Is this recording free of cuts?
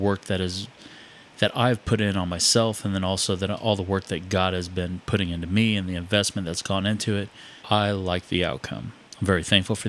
no; 1 cut; at 7.6 s

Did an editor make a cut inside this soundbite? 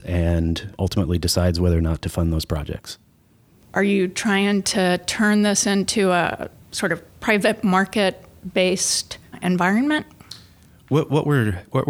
yes; 1 cut; at 7.1 s

